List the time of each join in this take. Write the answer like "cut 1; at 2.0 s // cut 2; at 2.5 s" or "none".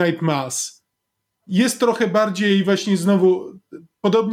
none